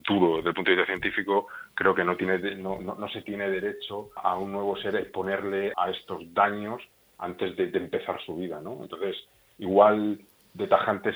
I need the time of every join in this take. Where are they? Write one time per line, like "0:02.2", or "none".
0:04.2
0:05.7